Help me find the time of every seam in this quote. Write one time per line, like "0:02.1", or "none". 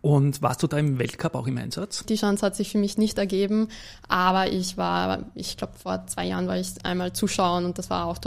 0:02.0